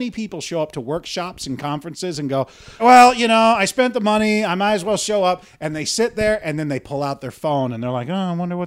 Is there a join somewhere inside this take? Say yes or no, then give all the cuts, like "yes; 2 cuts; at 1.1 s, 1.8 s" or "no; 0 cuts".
yes; 1 cut; at 2.8 s